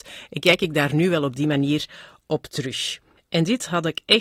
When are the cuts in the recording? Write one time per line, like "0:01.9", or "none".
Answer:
0:03.2